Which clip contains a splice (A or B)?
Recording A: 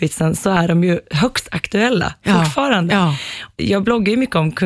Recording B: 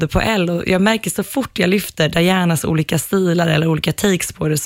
A